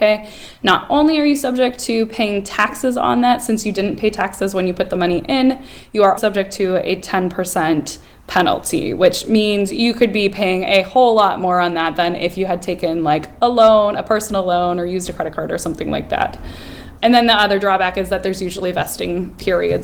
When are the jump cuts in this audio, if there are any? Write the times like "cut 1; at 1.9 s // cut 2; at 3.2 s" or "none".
cut 1; at 6.2 s // cut 2; at 17.0 s